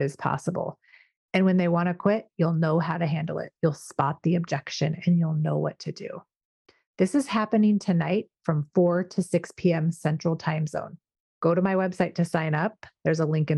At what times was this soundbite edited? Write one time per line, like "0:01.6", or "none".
none